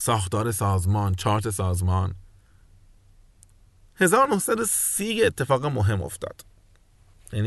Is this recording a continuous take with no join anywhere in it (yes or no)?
yes